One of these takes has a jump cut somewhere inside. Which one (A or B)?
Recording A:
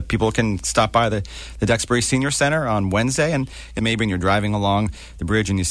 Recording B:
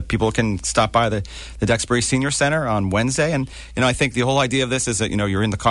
A